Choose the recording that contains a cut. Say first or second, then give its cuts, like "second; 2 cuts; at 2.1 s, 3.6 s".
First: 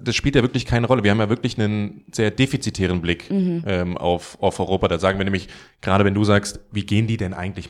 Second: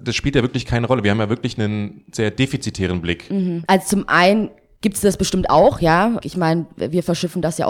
second; 2 cuts; at 3.7 s, 6.2 s